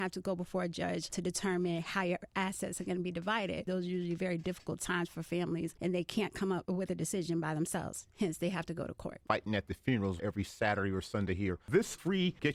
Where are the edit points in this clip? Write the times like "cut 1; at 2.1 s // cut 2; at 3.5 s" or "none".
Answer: cut 1; at 10.2 s